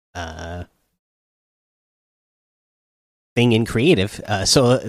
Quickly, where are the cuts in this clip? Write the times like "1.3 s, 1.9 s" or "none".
none